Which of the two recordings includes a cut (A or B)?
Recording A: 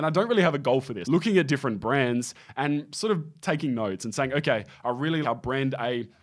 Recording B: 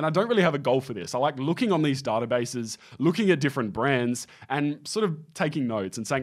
A